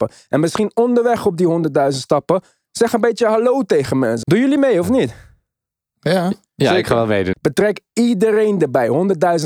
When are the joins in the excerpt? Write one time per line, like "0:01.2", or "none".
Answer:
0:04.2
0:07.3